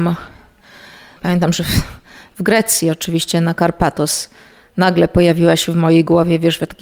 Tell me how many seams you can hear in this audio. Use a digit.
0